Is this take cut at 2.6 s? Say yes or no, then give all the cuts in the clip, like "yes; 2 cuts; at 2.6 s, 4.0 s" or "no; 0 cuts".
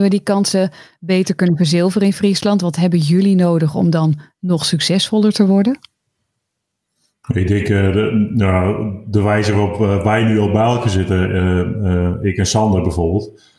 no; 0 cuts